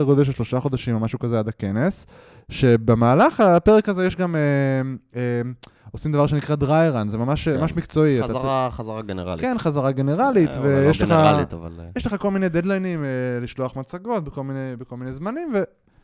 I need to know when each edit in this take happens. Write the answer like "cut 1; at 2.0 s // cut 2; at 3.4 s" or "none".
none